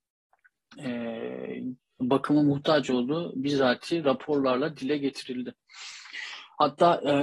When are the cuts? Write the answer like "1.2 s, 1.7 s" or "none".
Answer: 1.8 s